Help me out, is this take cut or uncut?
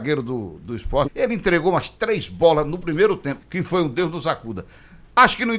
cut